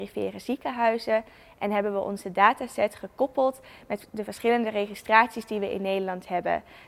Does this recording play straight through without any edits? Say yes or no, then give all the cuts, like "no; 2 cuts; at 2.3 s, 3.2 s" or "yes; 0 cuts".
yes; 0 cuts